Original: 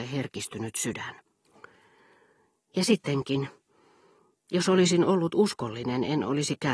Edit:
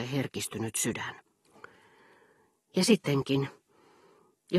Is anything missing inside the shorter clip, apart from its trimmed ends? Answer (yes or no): no